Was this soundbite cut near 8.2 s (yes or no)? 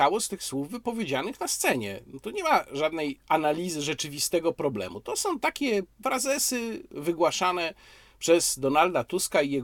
no